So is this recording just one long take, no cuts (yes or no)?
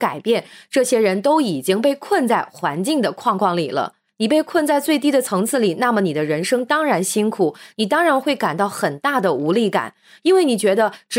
no